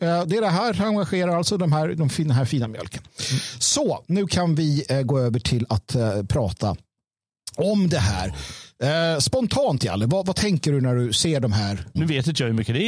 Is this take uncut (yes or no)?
no